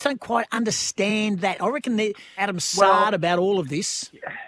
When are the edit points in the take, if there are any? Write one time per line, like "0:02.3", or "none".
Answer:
0:02.4